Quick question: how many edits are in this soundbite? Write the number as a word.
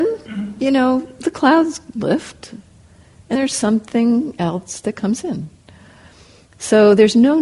one